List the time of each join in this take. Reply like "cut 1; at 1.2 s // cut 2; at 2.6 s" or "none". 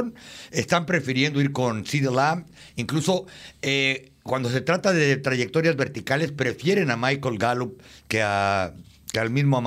none